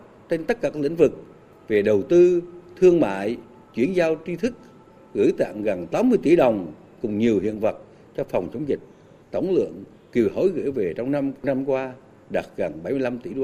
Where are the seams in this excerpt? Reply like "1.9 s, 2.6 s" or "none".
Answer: 5.0 s, 9.2 s